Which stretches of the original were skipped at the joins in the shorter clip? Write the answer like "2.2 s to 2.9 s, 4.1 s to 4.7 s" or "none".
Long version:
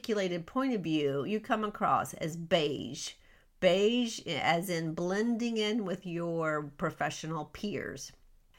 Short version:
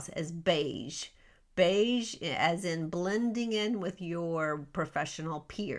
none

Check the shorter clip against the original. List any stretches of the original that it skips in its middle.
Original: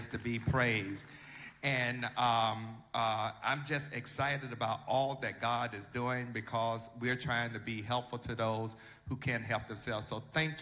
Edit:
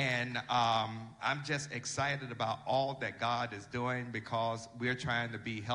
2.9 s to 3.4 s

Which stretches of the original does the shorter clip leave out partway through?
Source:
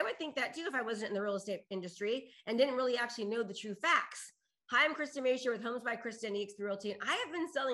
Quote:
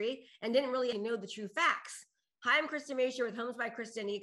3.0 s to 3.2 s

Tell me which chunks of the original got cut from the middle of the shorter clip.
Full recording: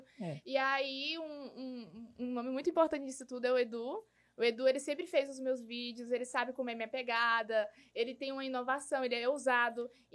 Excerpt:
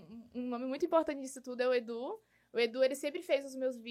none

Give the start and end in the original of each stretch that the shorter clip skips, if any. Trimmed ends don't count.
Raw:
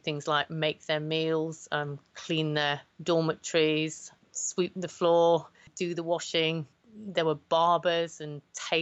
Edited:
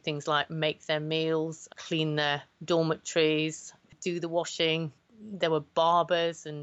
1.7 s to 2.1 s, 4.3 s to 5.6 s

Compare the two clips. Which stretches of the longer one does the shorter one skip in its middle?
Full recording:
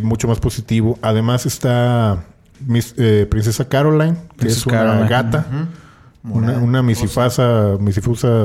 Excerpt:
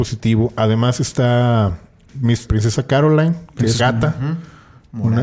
2.9 s to 3.3 s, 4.6 s to 5.1 s

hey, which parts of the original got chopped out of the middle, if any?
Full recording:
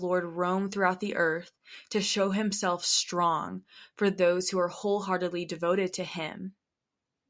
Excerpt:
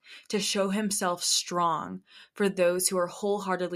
none

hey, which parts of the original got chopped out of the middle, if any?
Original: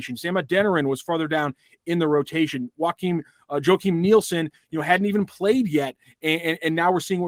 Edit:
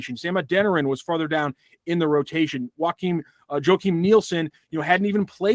none

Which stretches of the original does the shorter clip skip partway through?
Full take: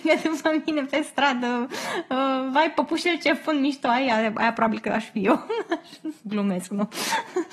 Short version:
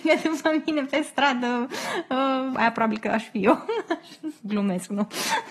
2.5 s to 4.3 s

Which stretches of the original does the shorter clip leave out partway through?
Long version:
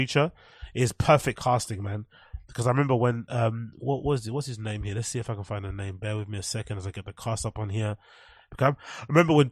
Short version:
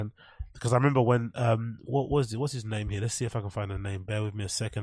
none

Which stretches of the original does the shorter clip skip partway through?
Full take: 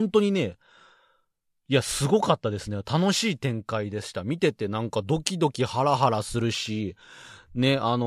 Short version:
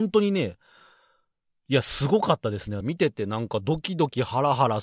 2.8 s to 4.2 s

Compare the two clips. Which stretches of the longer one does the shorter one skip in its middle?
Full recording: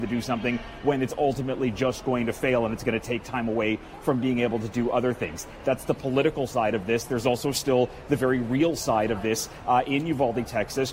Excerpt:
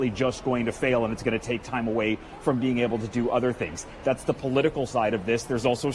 none

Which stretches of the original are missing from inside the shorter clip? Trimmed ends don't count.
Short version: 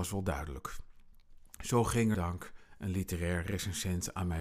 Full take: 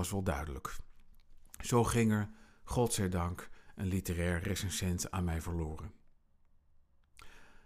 2.1 s to 3.1 s

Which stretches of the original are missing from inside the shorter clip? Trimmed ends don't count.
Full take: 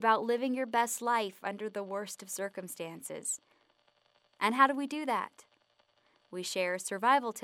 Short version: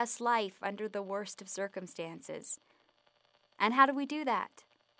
none

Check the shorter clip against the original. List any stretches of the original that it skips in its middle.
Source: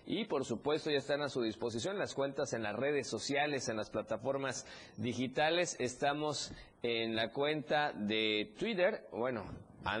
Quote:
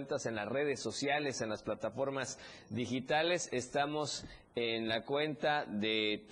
none

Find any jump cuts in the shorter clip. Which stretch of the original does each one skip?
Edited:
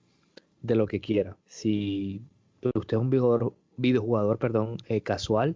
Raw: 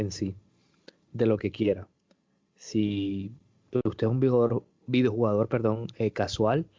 1.9 s to 2.5 s

